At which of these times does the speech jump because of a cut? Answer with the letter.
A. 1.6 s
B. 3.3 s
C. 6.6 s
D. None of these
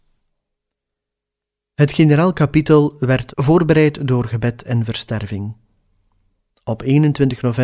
B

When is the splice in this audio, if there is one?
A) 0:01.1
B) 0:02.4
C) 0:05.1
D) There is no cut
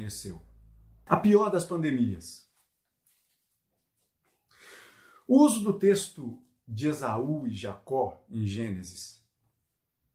A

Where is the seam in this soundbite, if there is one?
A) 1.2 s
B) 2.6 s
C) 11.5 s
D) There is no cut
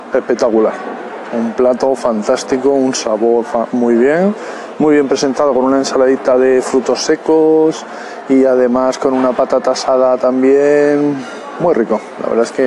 D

